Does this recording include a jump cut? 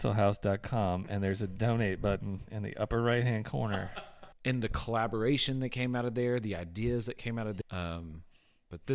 yes; 2 cuts; at 4.3 s, 7.6 s

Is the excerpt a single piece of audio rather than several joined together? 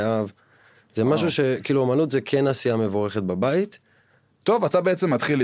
no; 1 cut; at 4.3 s

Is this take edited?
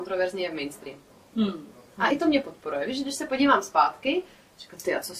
no; 0 cuts

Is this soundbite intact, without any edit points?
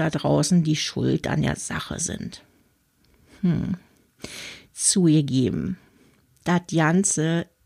yes; 0 cuts

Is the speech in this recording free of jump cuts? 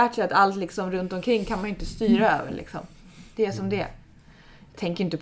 yes; 0 cuts

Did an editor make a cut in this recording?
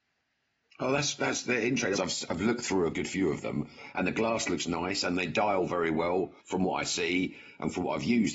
yes; 2 cuts; at 1.9 s, 6.4 s

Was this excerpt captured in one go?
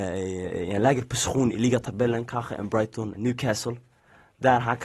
no; 1 cut; at 3.1 s

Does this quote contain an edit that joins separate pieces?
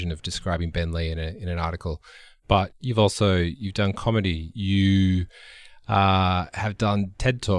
yes; 1 cut; at 4.5 s

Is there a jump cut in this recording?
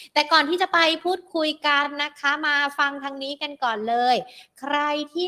no; 0 cuts

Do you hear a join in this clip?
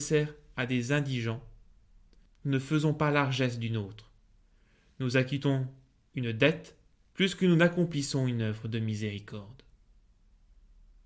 yes; 1 cut; at 2.3 s

